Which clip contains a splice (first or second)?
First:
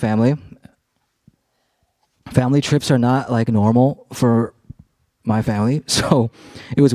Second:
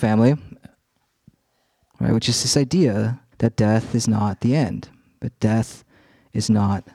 second